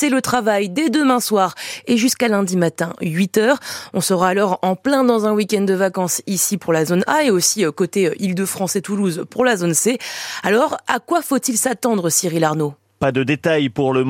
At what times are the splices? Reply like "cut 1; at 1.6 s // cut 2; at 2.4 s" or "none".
none